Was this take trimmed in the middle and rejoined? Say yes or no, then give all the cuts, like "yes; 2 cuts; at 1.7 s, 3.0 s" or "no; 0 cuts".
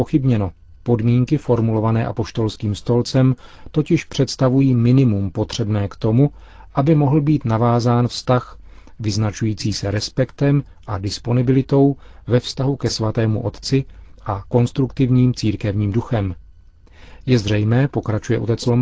no; 0 cuts